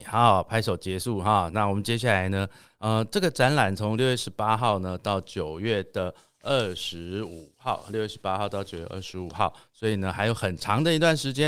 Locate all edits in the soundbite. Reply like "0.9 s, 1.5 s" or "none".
none